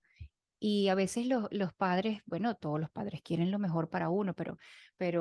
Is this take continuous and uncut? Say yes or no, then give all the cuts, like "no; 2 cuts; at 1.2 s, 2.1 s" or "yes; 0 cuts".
yes; 0 cuts